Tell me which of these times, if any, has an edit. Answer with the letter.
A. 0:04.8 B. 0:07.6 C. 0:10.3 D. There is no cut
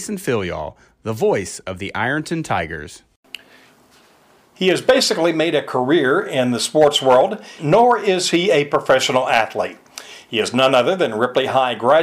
B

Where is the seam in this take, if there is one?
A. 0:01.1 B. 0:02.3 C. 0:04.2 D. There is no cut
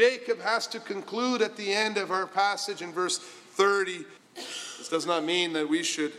C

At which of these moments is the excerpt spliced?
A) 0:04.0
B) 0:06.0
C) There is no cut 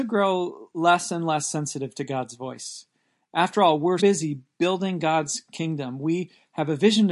A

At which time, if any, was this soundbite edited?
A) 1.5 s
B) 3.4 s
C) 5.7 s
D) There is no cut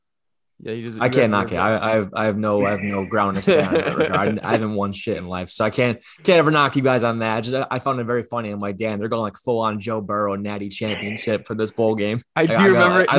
D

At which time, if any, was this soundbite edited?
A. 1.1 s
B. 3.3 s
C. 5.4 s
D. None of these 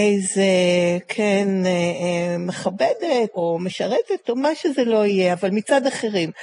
B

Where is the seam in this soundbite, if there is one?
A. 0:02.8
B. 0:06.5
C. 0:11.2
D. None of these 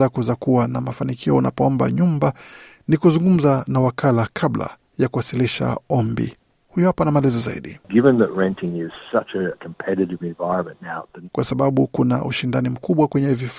C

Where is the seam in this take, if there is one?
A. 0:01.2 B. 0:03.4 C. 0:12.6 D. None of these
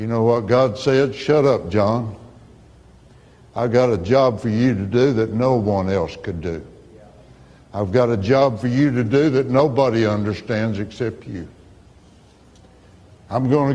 D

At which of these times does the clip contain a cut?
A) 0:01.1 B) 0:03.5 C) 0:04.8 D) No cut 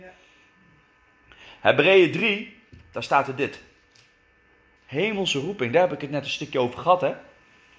C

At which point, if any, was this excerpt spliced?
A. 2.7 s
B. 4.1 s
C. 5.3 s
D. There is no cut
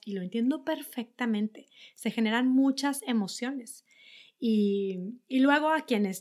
D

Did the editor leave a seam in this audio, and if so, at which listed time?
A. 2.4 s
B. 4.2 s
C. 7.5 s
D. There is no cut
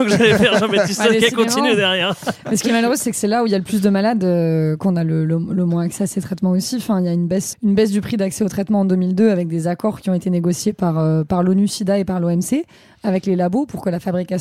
C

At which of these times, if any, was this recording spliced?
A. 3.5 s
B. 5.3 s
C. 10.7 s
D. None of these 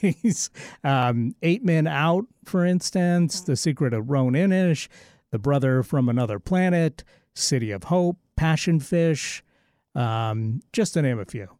C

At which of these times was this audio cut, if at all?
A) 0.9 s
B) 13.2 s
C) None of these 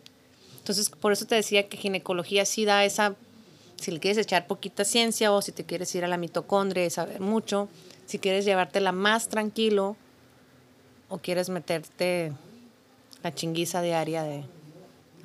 A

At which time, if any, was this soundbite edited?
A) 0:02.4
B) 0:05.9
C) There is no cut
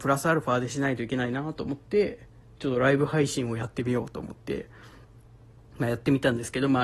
C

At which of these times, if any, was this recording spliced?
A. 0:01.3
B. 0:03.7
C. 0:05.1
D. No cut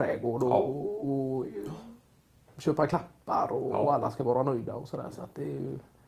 D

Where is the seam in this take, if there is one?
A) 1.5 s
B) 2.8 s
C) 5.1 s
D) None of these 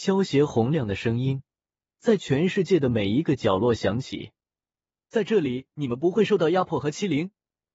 C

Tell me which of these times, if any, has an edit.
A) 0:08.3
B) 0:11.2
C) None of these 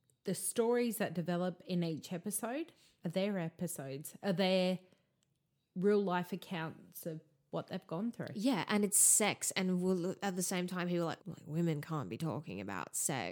B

